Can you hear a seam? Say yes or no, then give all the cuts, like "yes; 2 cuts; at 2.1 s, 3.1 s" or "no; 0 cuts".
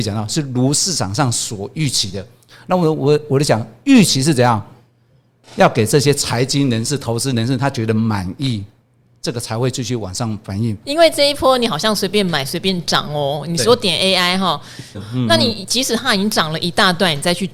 yes; 2 cuts; at 10.8 s, 14.9 s